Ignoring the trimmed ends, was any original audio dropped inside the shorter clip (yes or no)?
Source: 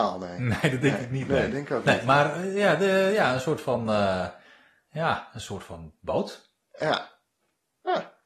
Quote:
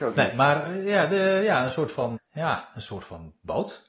yes